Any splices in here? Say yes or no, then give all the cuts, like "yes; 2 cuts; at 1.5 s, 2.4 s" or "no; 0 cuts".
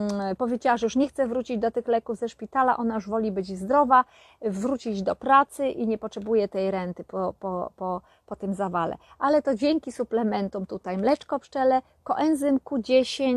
no; 0 cuts